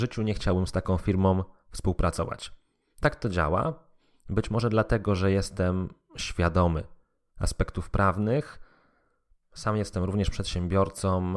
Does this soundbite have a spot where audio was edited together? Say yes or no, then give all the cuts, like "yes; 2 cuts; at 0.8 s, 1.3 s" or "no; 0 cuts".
no; 0 cuts